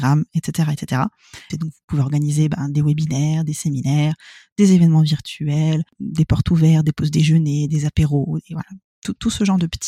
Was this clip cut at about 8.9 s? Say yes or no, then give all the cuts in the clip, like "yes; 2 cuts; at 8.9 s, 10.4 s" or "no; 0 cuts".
no; 2 cuts; at 1.5 s, 7.7 s